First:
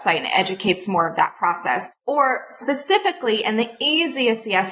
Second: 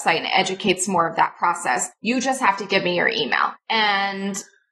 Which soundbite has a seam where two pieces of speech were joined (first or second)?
second